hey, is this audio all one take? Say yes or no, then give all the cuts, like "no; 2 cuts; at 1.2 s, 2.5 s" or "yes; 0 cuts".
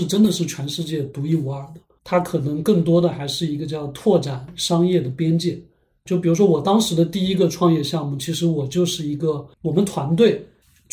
no; 2 cuts; at 2.0 s, 9.5 s